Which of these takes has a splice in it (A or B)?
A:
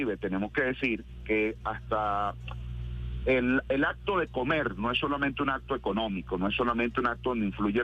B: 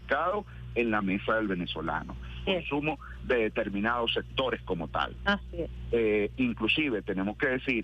B